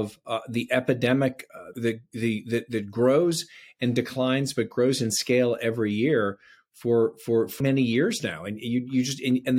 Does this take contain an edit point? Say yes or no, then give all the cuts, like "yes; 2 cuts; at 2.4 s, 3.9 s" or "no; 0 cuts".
yes; 2 cuts; at 1.7 s, 7.6 s